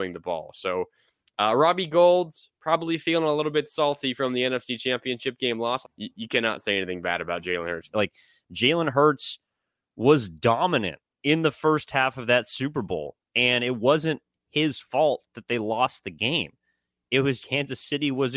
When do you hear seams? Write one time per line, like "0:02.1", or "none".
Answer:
0:05.8
0:07.9
0:17.4